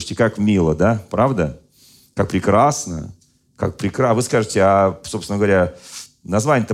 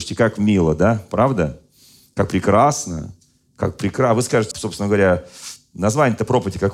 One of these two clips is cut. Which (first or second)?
second